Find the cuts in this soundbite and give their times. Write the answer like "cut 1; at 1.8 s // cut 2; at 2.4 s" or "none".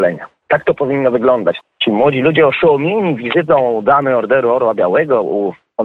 cut 1; at 1.6 s